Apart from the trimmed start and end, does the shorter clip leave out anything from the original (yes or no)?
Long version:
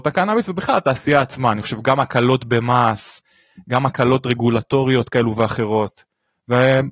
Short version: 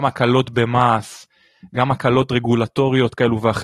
no